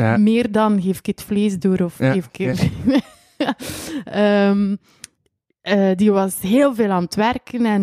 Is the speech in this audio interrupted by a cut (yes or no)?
no